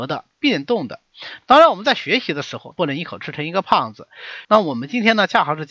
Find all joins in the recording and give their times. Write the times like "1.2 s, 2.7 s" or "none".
1.4 s, 2.7 s, 4.4 s